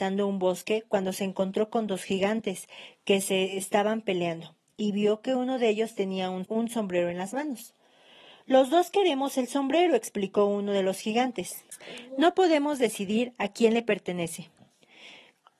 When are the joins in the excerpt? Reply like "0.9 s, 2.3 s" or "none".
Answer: 6.4 s